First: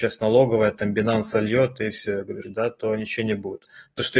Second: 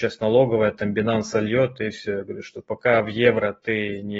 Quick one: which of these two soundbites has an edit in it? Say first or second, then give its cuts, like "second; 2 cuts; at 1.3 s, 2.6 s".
first; 1 cut; at 2.4 s